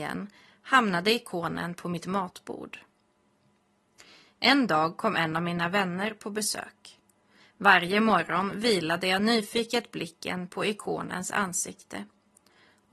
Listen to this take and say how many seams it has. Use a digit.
1